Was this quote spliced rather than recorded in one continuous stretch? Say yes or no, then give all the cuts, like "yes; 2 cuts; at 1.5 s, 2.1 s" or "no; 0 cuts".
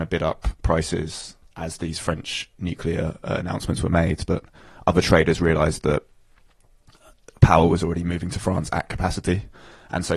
no; 0 cuts